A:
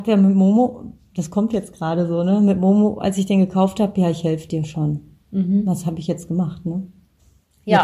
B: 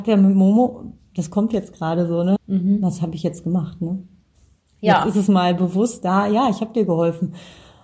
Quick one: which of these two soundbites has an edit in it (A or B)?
B